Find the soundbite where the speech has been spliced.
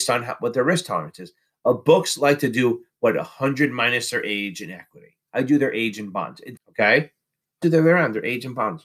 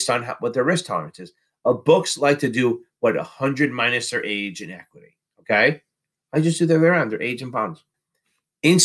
first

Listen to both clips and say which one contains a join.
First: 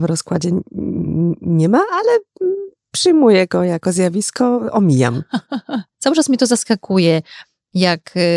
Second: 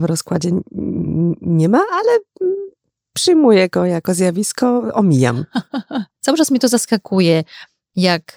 first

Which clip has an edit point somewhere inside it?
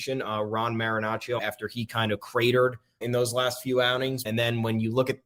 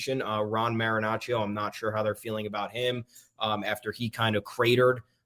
first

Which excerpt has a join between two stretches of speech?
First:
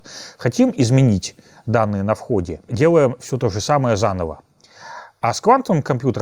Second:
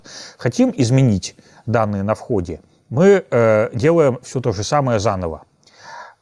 first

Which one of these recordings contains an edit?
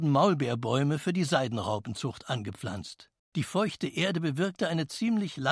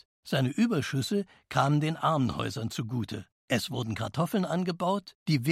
first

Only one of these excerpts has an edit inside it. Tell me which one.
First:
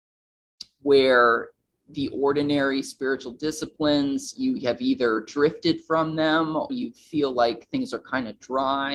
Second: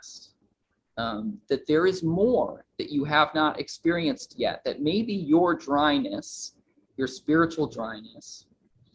first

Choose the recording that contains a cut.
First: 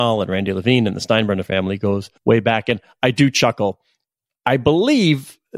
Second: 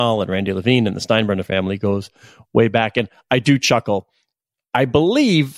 first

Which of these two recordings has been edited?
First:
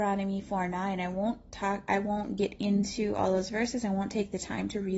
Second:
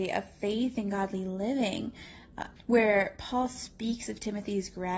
second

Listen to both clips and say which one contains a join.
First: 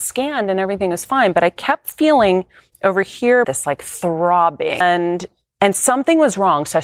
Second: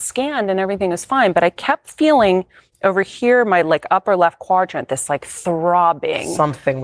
first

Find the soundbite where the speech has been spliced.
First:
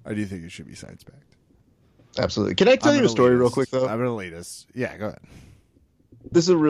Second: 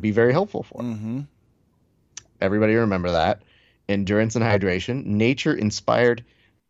second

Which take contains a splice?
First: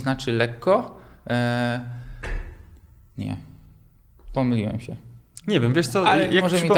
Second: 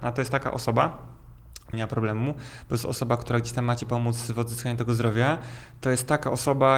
second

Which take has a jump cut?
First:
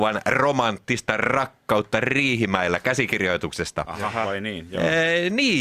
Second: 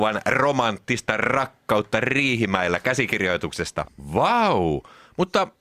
second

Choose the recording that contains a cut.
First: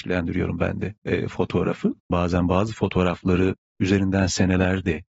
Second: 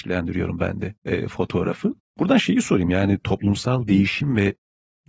first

